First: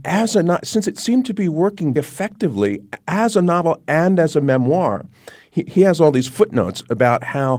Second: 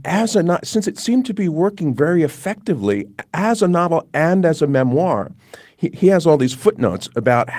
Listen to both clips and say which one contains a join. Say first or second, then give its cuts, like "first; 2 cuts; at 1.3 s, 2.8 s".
first; 1 cut; at 2.0 s